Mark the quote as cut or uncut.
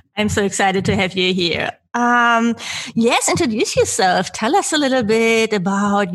uncut